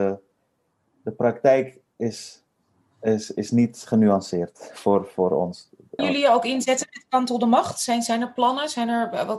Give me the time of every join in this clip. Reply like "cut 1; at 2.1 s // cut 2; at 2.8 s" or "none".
cut 1; at 6.0 s

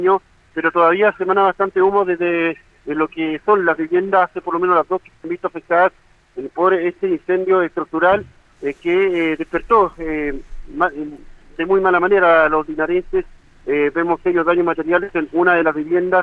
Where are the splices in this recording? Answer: none

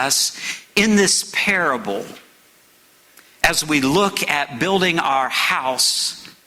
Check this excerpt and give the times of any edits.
none

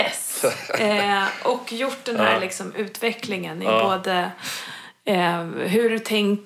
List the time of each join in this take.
none

